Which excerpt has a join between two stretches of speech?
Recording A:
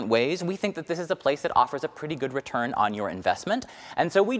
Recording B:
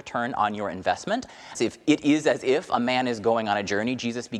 B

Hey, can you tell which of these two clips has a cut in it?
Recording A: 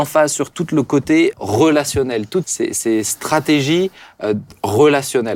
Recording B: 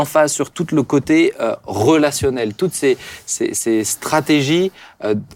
A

